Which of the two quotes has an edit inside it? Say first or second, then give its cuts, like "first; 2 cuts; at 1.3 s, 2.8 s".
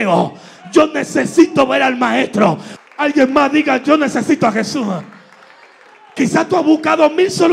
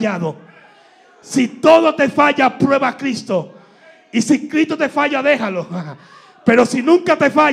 first; 1 cut; at 2.8 s